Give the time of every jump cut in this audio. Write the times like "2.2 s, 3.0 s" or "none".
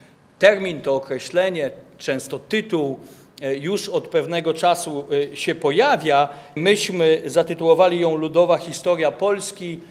6.6 s